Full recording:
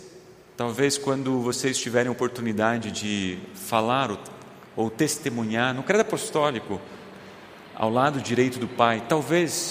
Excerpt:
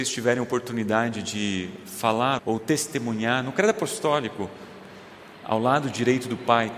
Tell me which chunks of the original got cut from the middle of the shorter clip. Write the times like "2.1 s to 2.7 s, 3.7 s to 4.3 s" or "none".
4.1 s to 4.7 s